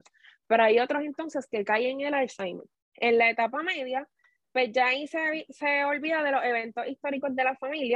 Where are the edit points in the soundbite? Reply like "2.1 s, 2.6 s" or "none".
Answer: 2.7 s